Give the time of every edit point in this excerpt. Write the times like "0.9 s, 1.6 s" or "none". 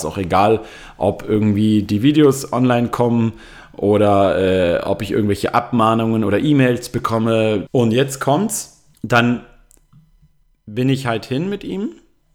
7.7 s, 8.9 s